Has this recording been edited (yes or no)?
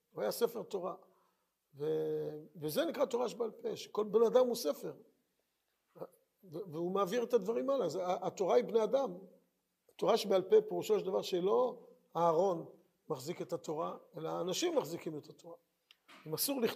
no